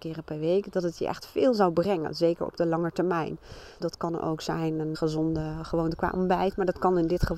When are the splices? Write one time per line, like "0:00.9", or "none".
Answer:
0:03.8
0:04.9